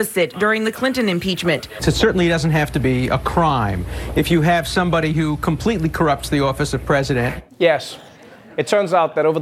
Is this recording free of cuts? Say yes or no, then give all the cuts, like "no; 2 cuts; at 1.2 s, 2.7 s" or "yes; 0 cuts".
no; 1 cut; at 7.5 s